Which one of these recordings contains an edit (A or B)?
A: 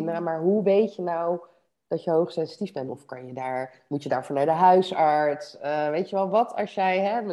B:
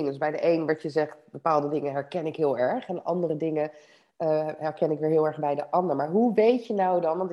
A